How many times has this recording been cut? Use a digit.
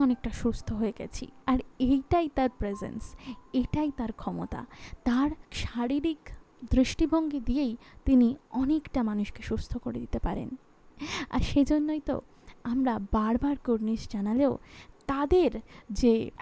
1